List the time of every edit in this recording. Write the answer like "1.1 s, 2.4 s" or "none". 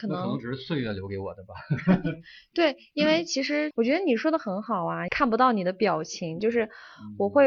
3.7 s, 5.1 s, 6.4 s